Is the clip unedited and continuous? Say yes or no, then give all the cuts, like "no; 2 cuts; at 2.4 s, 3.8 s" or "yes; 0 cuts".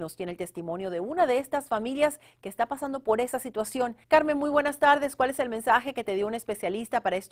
no; 1 cut; at 4.0 s